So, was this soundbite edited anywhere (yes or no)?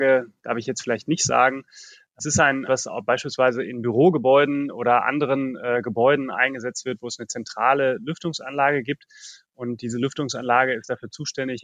yes